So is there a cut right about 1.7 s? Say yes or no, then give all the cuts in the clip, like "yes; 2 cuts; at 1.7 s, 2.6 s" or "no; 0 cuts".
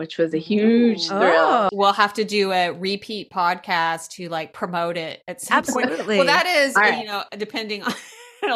yes; 1 cut; at 1.7 s